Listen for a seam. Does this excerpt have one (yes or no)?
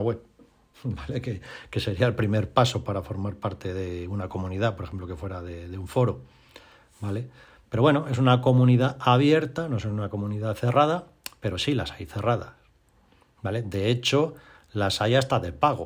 no